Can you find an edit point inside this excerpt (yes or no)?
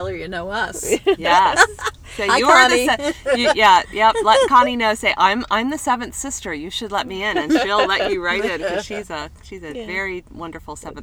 no